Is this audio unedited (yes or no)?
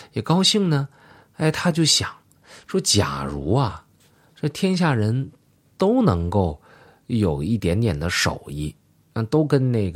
yes